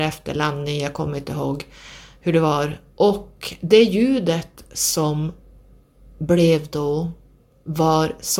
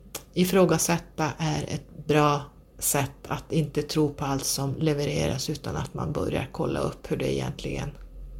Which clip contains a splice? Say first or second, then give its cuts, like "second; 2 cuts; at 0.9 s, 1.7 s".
first; 1 cut; at 3.0 s